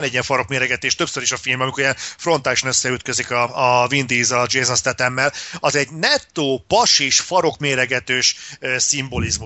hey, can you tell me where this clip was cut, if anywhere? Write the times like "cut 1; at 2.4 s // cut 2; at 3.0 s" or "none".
none